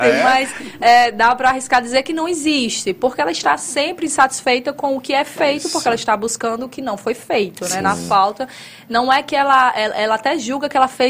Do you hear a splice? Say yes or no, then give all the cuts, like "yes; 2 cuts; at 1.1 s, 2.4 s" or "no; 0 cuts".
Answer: no; 0 cuts